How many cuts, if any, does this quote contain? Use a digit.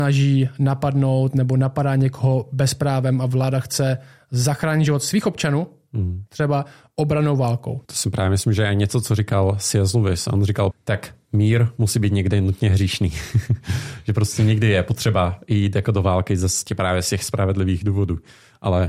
2